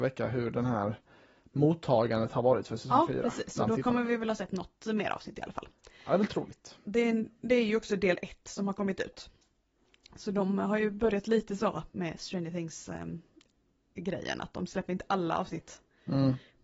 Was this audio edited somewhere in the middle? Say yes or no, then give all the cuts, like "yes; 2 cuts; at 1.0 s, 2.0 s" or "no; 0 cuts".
no; 0 cuts